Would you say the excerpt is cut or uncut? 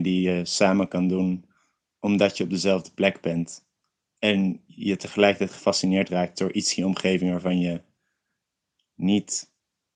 uncut